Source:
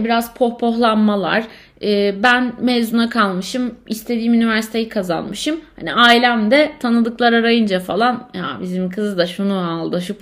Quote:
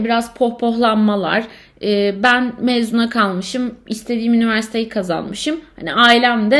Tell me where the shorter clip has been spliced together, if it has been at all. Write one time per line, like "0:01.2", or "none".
none